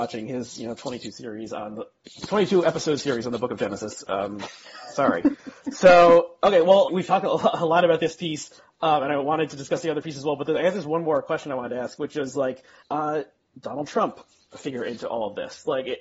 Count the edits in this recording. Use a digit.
2